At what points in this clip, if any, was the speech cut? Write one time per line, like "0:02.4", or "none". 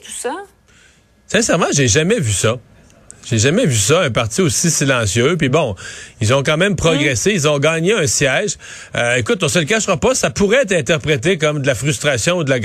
none